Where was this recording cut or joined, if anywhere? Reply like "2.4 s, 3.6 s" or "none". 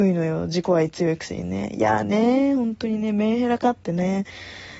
none